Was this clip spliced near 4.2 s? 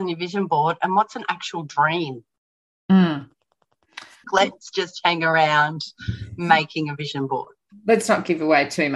yes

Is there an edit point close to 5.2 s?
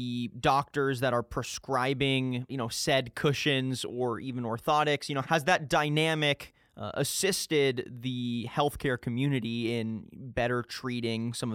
yes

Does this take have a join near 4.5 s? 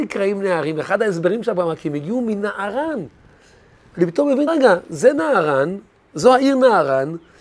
yes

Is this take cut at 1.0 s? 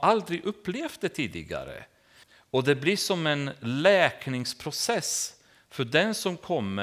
no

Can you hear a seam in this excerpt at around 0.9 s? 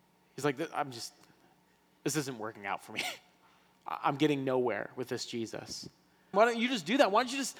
no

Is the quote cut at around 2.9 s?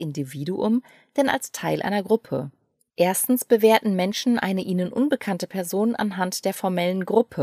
yes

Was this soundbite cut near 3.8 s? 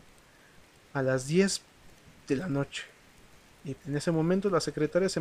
yes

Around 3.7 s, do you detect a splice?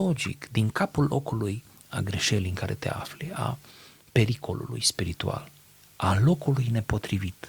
no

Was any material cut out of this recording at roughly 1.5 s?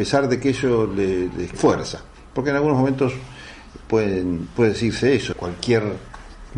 yes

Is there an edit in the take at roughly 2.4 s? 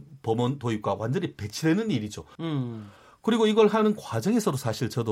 yes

